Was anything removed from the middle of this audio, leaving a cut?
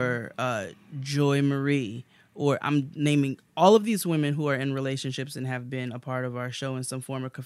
no; 0 cuts

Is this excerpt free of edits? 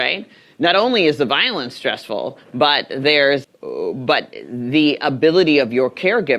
no; 1 cut; at 3.4 s

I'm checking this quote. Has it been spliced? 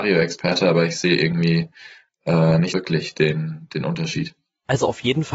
yes; 1 cut; at 2.7 s

